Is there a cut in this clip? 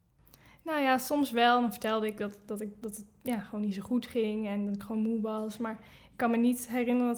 no; 0 cuts

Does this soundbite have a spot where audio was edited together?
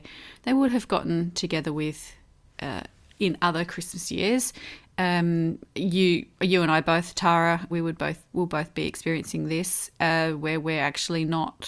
yes; 1 cut; at 7.7 s

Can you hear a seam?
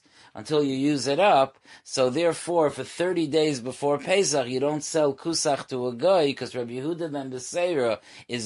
no; 0 cuts

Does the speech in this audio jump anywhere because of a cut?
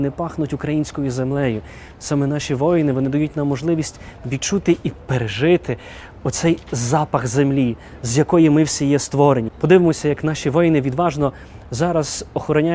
yes; 1 cut; at 9.5 s

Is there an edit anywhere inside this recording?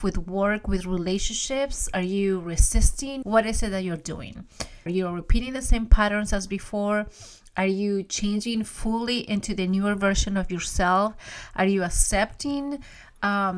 yes; 2 cuts; at 3.2 s, 4.9 s

